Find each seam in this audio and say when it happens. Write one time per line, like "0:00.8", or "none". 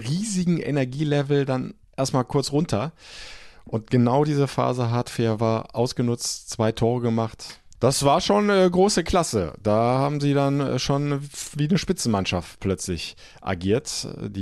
0:07.7